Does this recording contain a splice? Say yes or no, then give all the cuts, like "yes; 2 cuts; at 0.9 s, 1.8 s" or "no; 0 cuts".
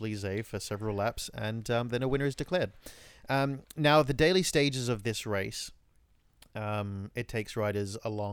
no; 0 cuts